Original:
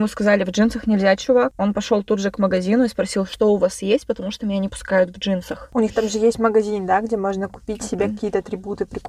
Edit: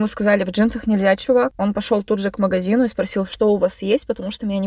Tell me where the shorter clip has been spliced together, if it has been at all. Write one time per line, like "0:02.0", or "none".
none